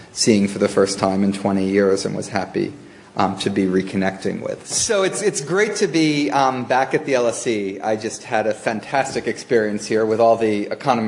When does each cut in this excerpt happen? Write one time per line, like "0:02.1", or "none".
0:04.6